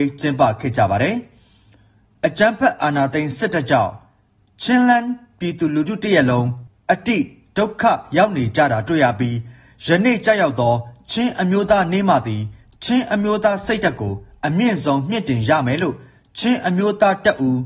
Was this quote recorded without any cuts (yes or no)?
yes